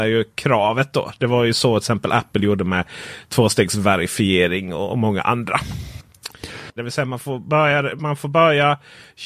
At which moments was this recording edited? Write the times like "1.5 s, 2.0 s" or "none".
6.8 s

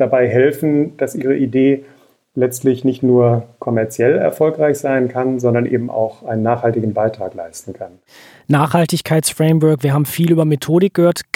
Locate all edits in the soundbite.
none

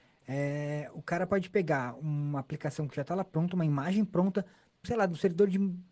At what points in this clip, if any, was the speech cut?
4.8 s

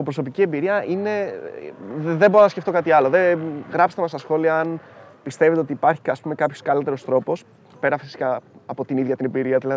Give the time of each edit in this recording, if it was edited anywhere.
none

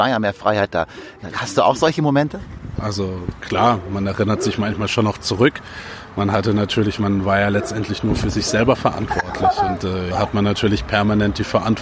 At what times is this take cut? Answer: 2.8 s, 10.1 s

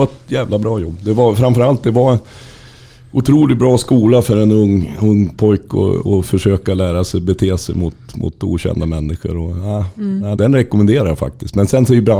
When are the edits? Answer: 10.4 s

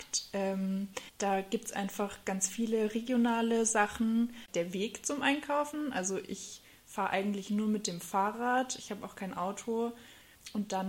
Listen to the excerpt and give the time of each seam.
1.1 s, 4.5 s

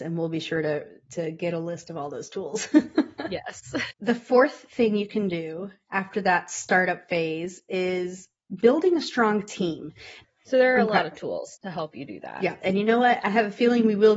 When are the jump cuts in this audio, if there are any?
3.9 s, 10.2 s, 12.6 s

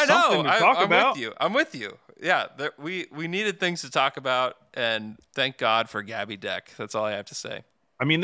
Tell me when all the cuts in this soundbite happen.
5.3 s

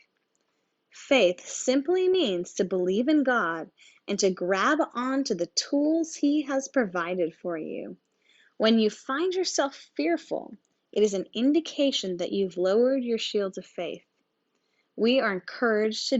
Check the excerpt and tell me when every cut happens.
none

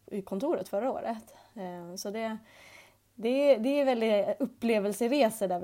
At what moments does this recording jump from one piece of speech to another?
none

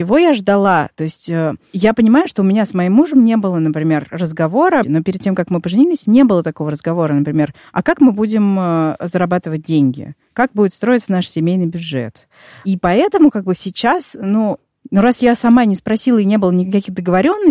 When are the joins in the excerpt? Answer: 4.8 s

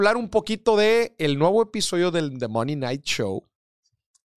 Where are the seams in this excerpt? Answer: none

